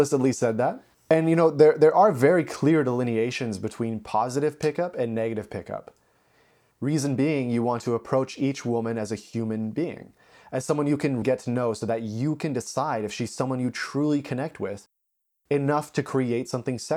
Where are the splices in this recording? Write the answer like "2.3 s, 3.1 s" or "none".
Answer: 6.7 s, 11.2 s